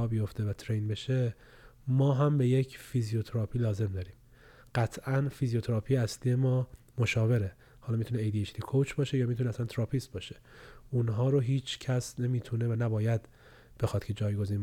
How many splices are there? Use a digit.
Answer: 0